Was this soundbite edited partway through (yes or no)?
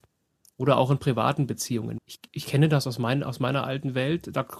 yes